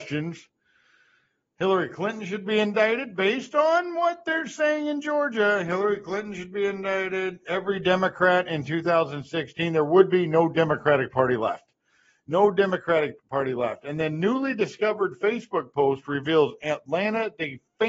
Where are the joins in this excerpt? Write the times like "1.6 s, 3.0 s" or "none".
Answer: 13.2 s